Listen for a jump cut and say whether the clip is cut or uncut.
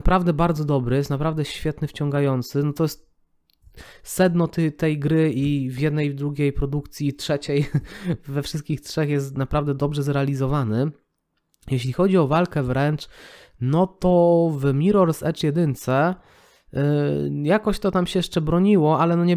uncut